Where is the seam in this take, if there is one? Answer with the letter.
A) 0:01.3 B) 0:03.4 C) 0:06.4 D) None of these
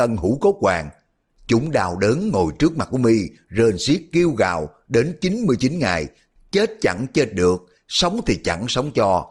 D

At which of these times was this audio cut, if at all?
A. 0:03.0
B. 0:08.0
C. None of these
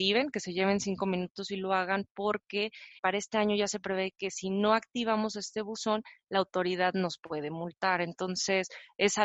A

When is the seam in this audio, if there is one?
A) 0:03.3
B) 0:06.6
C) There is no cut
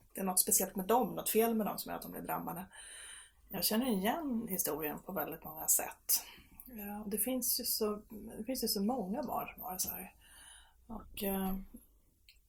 A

